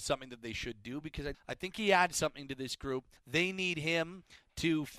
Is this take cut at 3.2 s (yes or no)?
yes